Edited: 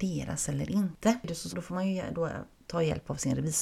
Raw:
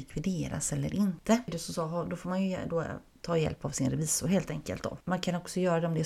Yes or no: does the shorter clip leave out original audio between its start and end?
yes